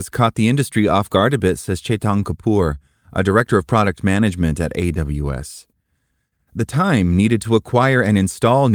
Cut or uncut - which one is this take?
uncut